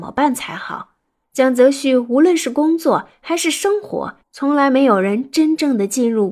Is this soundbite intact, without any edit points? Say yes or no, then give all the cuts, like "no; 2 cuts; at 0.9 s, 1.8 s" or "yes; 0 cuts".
no; 2 cuts; at 1.2 s, 4.2 s